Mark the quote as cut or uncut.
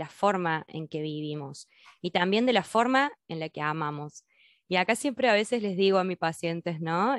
uncut